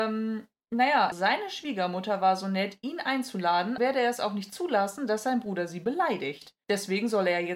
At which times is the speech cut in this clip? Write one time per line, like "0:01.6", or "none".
0:01.1
0:03.8